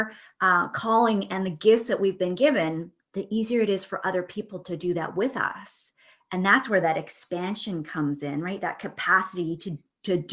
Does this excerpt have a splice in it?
no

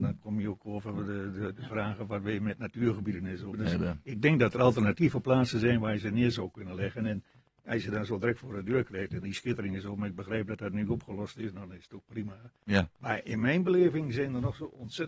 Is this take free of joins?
no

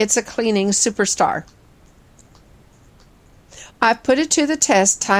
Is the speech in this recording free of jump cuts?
no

